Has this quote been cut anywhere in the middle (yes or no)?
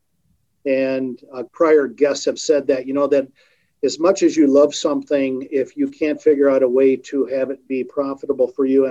yes